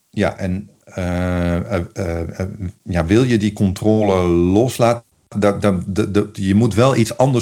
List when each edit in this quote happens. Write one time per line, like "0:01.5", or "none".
none